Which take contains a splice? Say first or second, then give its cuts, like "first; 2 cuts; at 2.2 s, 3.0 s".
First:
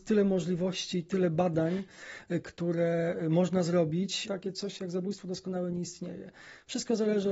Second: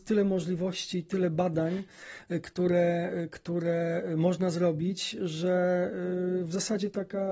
first; 2 cuts; at 2.4 s, 4.3 s